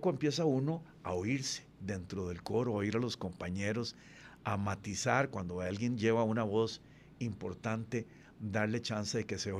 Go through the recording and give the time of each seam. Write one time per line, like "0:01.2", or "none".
none